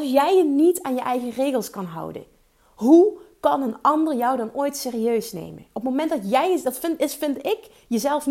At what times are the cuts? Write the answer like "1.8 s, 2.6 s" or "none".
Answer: none